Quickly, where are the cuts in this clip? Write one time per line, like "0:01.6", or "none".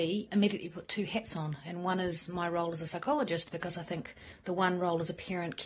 0:03.4